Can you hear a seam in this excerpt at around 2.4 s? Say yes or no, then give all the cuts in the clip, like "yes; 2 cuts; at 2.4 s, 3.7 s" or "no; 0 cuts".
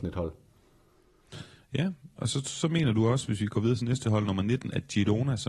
no; 0 cuts